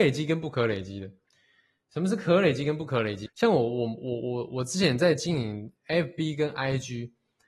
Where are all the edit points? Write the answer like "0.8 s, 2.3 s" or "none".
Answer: 3.3 s